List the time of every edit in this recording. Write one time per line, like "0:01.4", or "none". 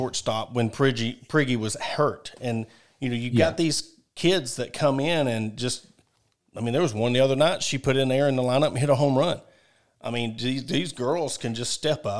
none